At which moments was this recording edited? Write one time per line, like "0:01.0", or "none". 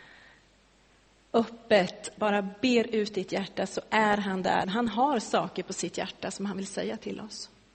0:02.2
0:04.6